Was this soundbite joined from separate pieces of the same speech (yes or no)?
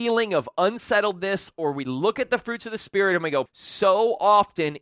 yes